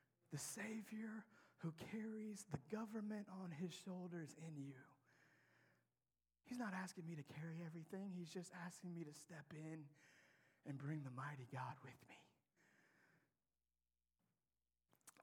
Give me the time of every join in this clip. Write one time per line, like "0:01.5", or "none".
none